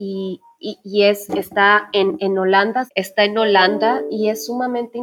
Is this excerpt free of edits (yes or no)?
no